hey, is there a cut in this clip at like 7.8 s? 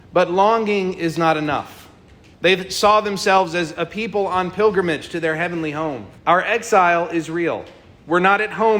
no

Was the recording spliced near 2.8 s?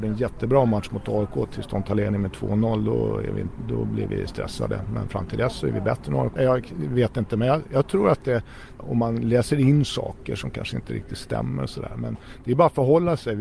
no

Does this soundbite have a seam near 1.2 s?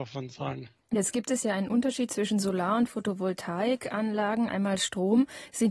no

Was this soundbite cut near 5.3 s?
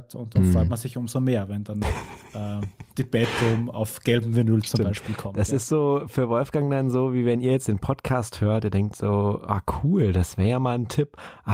no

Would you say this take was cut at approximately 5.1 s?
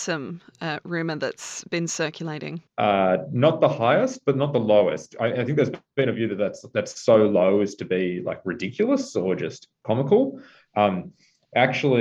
no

